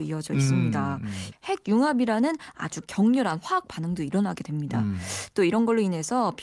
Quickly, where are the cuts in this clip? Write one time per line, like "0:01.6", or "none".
0:01.3